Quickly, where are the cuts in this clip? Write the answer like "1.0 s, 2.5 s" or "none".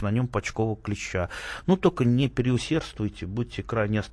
none